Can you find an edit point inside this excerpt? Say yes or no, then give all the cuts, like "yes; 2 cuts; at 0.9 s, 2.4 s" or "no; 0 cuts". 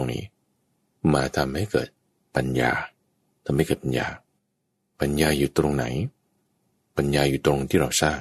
no; 0 cuts